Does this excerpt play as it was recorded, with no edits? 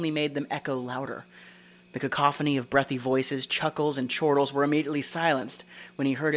yes; 0 cuts

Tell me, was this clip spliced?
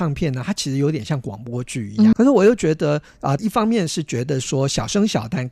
yes; 2 cuts; at 2.1 s, 3.4 s

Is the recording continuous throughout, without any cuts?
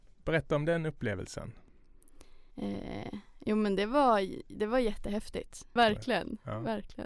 no; 2 cuts; at 2.5 s, 5.8 s

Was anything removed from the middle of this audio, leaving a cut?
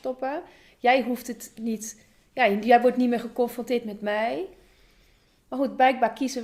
no; 0 cuts

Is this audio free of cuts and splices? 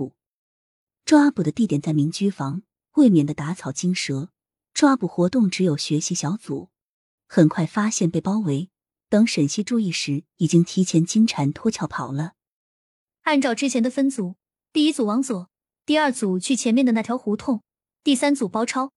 no; 1 cut; at 7.2 s

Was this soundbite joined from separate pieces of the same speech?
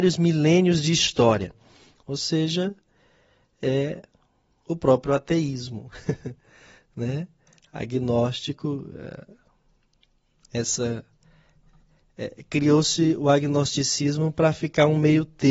yes; 1 cut; at 2.0 s

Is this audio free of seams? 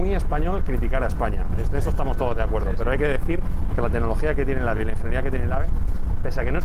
yes; 0 cuts

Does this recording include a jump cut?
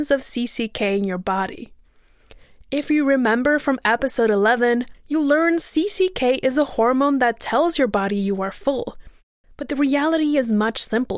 yes; 2 cuts; at 4.9 s, 9.4 s

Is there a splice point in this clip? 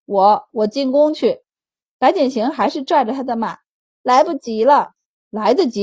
no; 0 cuts

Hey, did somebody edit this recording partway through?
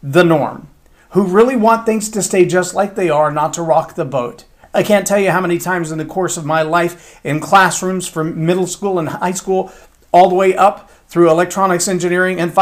no; 0 cuts

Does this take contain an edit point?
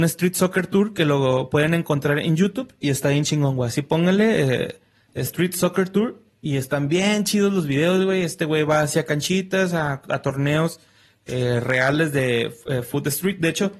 no; 0 cuts

